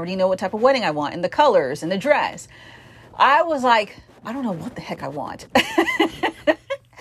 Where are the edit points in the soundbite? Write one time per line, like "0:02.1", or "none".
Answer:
none